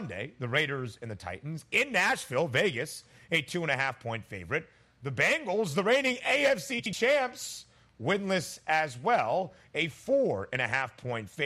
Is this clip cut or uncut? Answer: uncut